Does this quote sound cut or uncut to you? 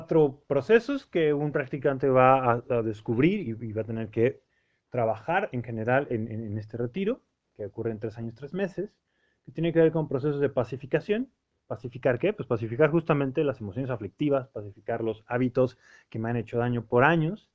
uncut